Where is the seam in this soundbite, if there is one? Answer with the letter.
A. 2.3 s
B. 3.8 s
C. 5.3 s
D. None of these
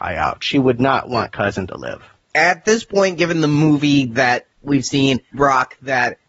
C